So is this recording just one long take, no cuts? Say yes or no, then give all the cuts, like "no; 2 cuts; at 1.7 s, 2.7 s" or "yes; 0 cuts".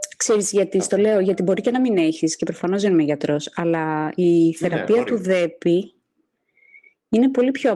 yes; 0 cuts